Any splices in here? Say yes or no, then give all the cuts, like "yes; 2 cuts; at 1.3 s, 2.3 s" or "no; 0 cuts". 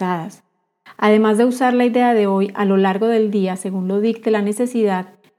yes; 1 cut; at 1.0 s